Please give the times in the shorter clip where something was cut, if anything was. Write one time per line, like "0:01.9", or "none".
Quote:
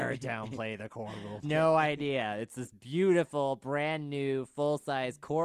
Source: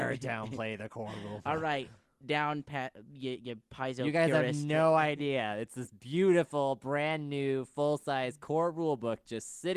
0:01.4